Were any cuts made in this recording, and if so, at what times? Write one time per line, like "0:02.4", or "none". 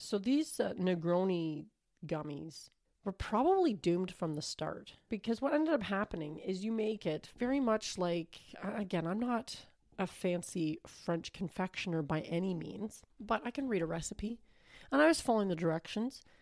0:02.9
0:13.1